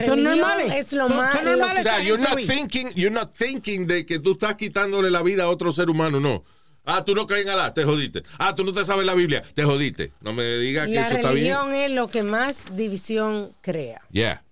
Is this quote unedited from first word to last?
yes; 0 cuts

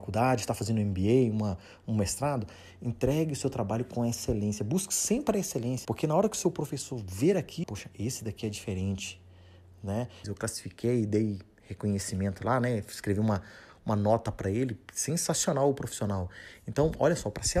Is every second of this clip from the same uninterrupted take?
no; 3 cuts; at 5.8 s, 7.6 s, 10.2 s

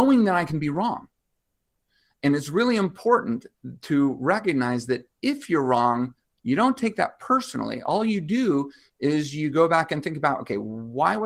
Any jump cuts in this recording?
no; 0 cuts

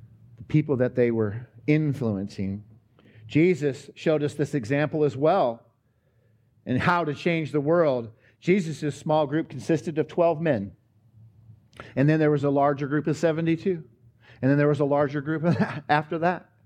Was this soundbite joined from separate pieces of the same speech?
no; 0 cuts

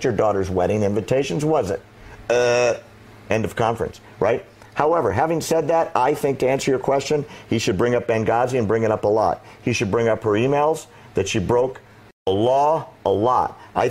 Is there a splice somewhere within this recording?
no; 0 cuts

